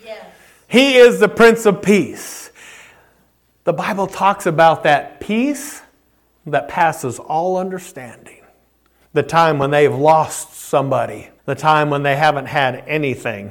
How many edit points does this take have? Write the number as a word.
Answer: two